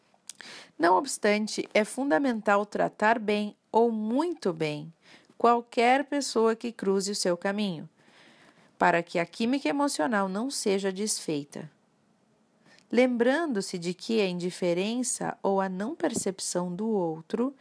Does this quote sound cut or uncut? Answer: uncut